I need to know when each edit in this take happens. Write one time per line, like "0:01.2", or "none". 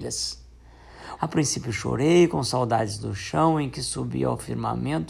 0:01.2